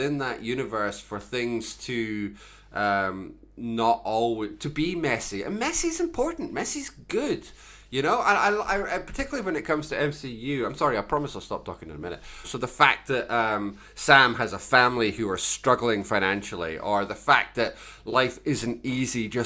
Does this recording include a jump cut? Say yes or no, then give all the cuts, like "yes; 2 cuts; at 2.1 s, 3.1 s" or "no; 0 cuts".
yes; 1 cut; at 12.4 s